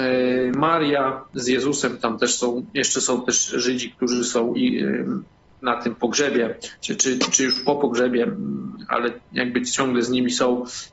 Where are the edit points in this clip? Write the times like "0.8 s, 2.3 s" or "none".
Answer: none

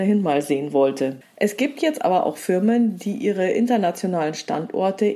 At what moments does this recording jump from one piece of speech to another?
1.2 s

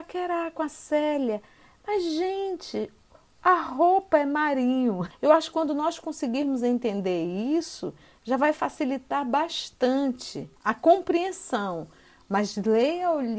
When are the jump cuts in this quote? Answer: 5.1 s, 10.6 s

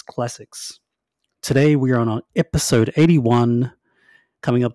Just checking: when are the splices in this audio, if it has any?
none

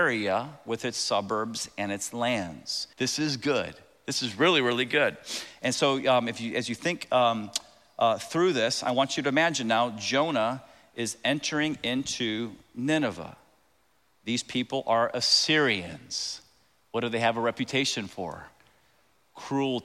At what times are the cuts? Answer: 2.9 s

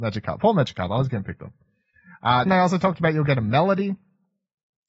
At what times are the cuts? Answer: 2.5 s

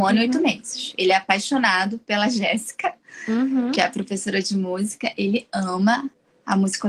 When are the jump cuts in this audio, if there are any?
none

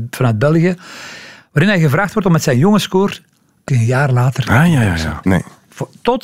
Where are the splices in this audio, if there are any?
3.7 s, 5.2 s

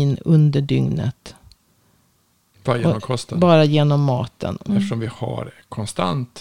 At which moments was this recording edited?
4.7 s

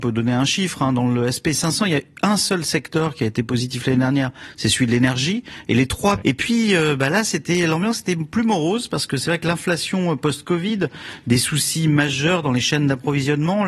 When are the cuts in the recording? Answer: 6.2 s

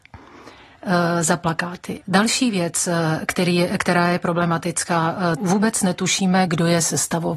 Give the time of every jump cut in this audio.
2.0 s, 5.4 s, 6.5 s

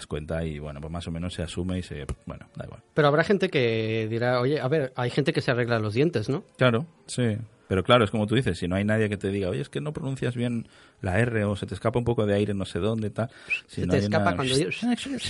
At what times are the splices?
7.1 s

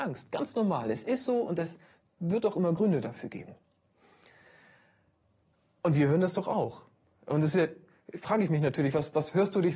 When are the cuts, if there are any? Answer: none

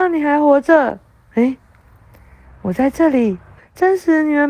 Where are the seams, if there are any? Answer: 3.6 s

